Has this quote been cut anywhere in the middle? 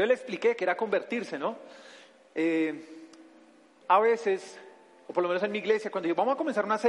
yes; 1 cut; at 3.8 s

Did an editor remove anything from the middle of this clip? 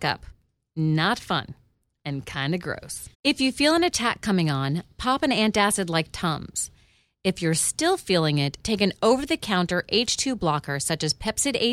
yes; 1 cut; at 3.1 s

